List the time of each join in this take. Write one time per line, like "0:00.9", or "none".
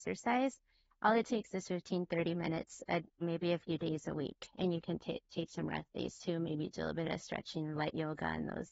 0:03.2

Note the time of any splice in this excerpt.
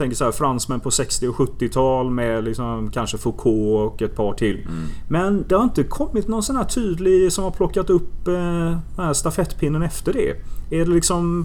none

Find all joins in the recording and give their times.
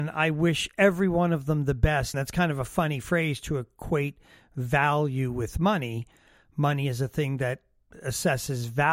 0:02.1

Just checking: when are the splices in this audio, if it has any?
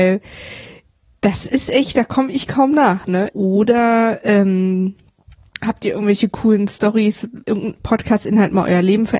0:03.3
0:07.4

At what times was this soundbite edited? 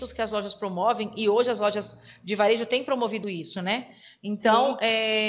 0:03.2

